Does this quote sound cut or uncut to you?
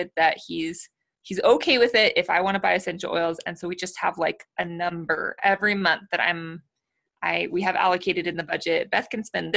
uncut